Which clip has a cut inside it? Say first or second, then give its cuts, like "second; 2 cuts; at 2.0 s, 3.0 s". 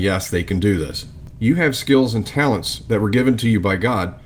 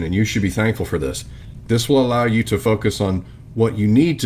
first; 1 cut; at 1.3 s